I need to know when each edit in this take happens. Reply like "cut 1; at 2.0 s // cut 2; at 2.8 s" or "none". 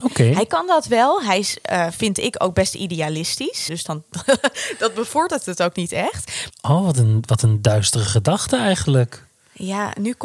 cut 1; at 3.7 s // cut 2; at 6.5 s